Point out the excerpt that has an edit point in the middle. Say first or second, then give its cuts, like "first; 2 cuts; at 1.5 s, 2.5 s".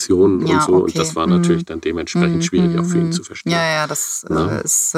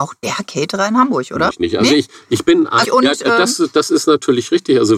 second; 2 cuts; at 1.5 s, 2.8 s